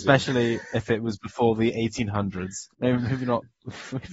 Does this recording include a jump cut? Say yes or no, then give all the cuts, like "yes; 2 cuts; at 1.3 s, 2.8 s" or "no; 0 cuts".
yes; 1 cut; at 2.7 s